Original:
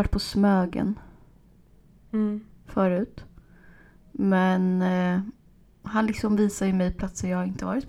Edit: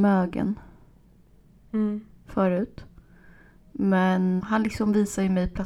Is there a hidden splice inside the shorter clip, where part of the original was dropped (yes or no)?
yes